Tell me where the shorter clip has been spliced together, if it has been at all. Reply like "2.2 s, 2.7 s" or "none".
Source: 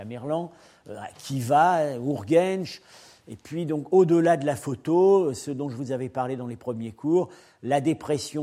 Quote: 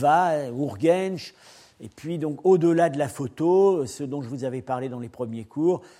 none